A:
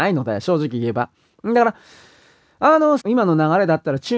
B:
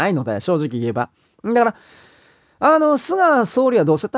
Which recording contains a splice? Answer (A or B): A